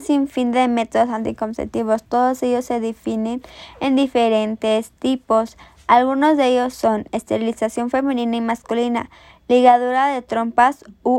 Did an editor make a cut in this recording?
no; 0 cuts

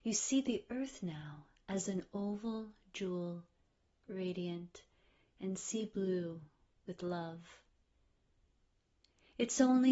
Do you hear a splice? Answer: no; 0 cuts

